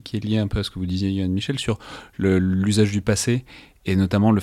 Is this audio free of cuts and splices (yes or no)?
yes